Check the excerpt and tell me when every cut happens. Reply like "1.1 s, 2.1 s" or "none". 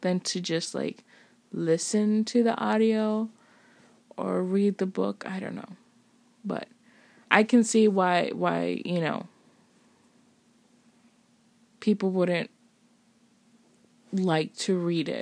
none

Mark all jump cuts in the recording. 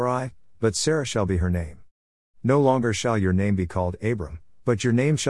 2.2 s

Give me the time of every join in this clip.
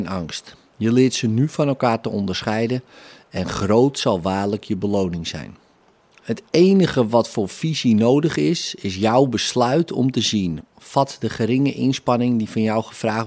10.6 s

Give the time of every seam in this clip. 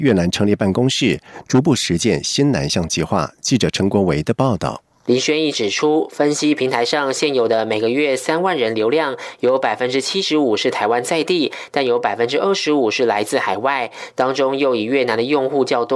5.0 s

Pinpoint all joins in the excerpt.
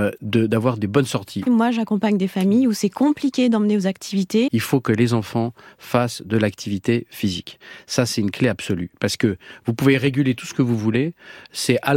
1.5 s, 4.5 s

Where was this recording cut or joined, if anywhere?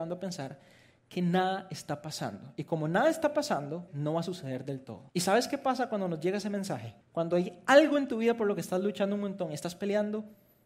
3.9 s, 5.1 s, 7.0 s

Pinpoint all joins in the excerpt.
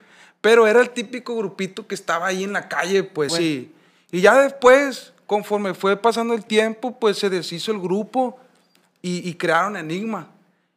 3.3 s

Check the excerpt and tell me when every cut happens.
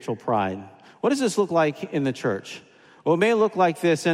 none

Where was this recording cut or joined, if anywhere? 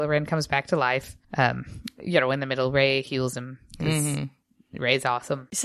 1.2 s

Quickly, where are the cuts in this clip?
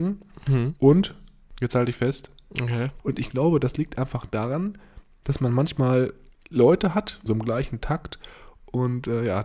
3.0 s, 7.3 s

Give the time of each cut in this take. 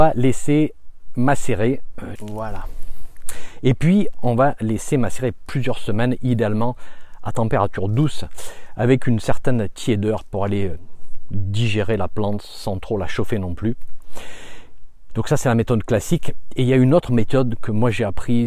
2.2 s

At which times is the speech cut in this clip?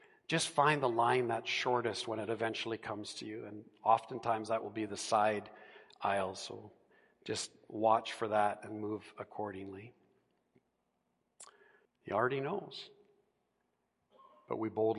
11.9 s

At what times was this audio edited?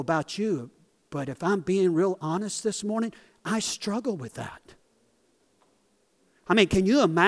none

